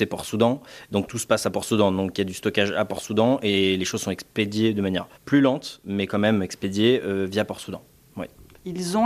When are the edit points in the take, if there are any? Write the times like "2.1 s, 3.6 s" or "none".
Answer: 5.1 s